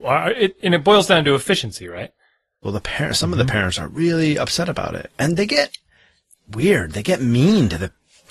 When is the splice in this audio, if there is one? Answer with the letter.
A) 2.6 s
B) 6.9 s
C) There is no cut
A